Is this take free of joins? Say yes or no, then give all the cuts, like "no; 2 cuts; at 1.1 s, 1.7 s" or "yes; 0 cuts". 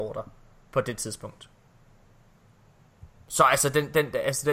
yes; 0 cuts